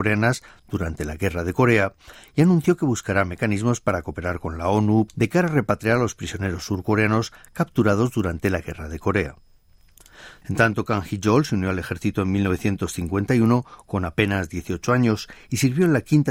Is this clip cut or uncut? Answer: cut